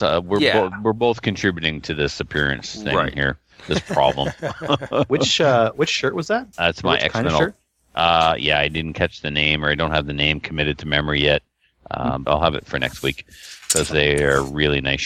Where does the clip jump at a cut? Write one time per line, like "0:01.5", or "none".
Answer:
0:06.5
0:12.2